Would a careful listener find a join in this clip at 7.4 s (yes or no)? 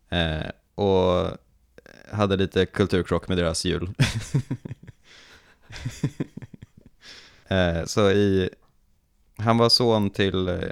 yes